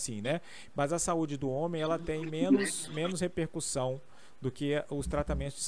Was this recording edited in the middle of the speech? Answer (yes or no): no